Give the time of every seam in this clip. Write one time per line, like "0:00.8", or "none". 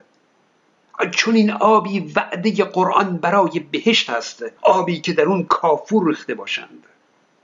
0:04.6